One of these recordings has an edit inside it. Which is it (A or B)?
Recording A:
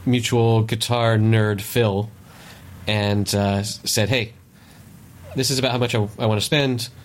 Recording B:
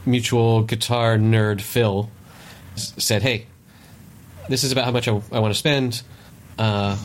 B